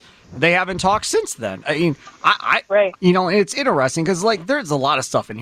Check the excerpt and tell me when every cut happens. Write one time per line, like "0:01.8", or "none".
0:02.9